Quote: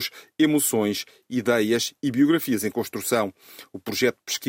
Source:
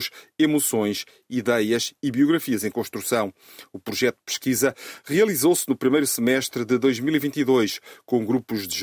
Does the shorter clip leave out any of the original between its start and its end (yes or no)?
no